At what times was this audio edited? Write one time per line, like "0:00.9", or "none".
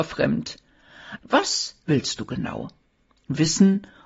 0:01.2